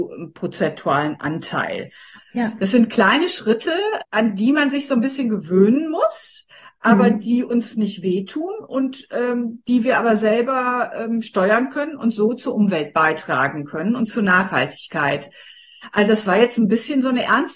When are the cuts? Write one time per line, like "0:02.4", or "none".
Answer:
0:02.2
0:04.0